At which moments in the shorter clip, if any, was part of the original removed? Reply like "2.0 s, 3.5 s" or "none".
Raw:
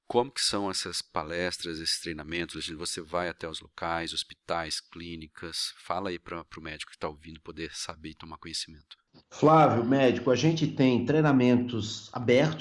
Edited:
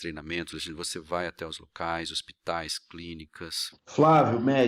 3.7 s